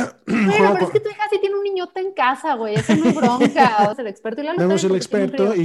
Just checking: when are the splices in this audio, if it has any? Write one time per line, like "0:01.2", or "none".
0:03.9